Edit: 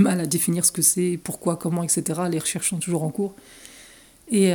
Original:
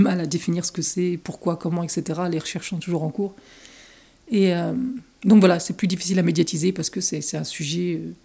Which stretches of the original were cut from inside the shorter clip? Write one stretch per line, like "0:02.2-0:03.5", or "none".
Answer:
none